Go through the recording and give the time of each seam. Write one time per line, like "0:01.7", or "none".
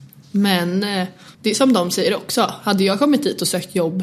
0:01.3